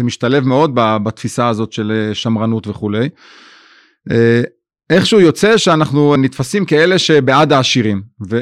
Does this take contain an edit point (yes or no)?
yes